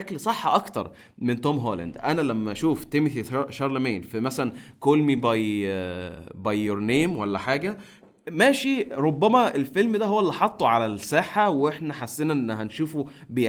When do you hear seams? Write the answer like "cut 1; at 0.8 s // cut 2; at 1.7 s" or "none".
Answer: none